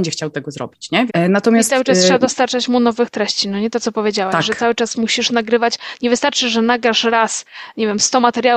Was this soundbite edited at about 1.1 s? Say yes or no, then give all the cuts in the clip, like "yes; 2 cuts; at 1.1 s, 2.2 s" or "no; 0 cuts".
yes; 1 cut; at 1.1 s